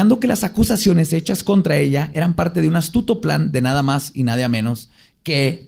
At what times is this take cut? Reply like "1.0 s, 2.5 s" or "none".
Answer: none